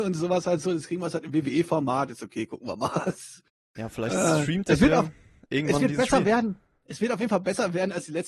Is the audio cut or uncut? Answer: uncut